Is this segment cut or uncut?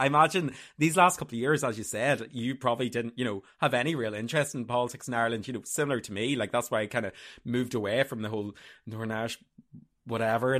uncut